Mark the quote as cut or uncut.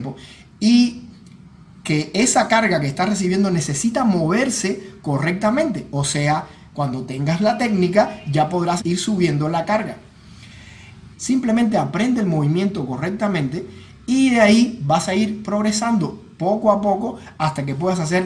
cut